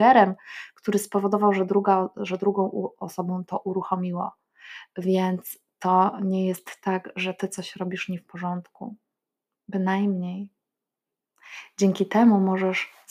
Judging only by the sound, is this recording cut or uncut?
uncut